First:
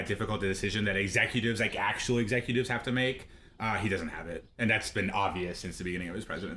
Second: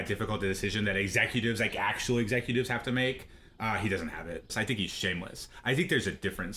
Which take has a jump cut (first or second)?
second